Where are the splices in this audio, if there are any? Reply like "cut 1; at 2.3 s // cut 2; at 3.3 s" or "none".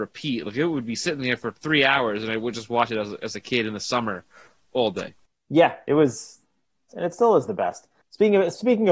cut 1; at 4.6 s // cut 2; at 6.9 s